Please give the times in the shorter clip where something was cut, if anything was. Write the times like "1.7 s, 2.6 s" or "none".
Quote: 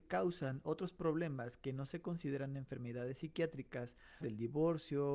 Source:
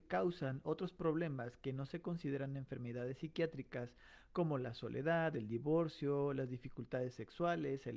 4.2 s